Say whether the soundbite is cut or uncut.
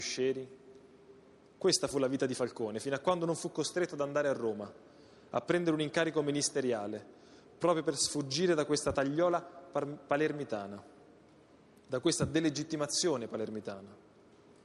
uncut